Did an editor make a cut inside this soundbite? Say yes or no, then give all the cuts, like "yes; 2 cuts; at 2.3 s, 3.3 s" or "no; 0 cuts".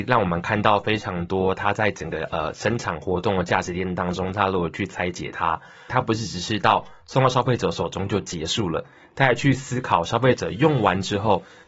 yes; 1 cut; at 5.9 s